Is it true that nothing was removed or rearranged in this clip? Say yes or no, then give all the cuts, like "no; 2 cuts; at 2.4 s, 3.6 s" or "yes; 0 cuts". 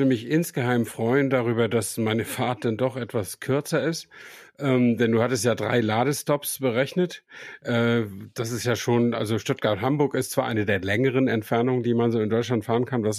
yes; 0 cuts